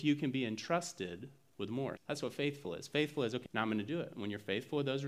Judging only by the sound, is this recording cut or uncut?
cut